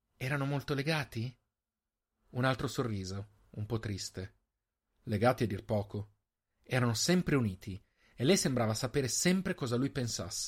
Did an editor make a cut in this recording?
no; 0 cuts

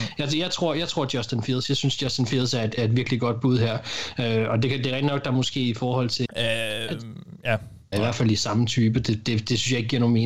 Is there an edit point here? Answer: yes; 3 cuts; at 2.8 s, 6.3 s, 7.9 s

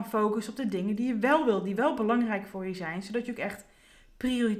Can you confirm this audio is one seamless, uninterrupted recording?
yes; 0 cuts

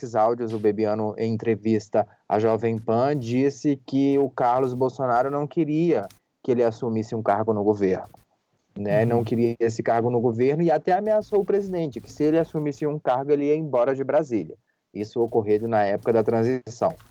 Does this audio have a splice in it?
no; 0 cuts

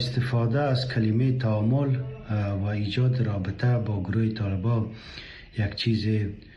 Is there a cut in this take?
no; 0 cuts

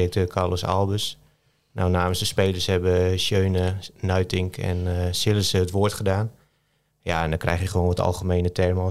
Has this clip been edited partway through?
no; 0 cuts

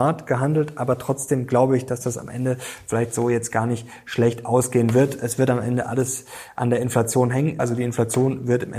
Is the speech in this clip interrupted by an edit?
yes; 1 cut; at 7.6 s

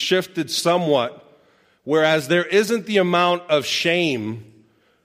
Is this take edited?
no; 0 cuts

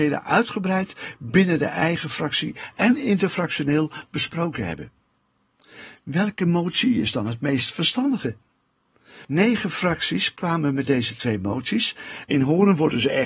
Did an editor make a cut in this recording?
yes; 2 cuts; at 9.2 s, 12.2 s

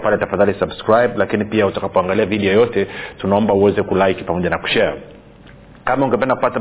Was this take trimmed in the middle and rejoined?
no; 0 cuts

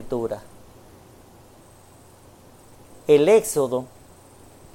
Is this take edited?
no; 0 cuts

